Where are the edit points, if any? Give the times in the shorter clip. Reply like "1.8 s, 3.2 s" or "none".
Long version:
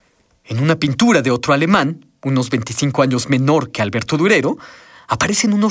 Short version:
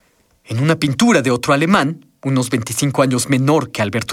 none